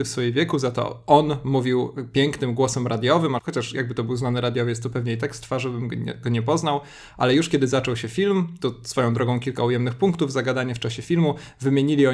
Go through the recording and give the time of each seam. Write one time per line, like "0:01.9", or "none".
0:03.4